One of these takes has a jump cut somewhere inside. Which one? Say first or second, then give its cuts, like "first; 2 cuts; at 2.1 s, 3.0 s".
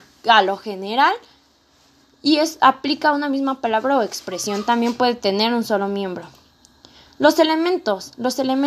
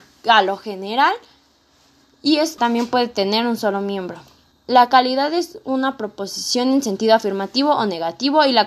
second; 2 cuts; at 2.6 s, 4.5 s